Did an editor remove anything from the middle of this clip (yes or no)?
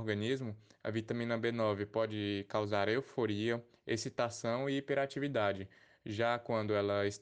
no